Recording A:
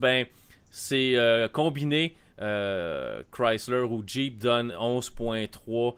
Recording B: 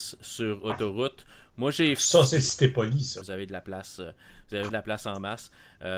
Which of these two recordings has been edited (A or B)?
B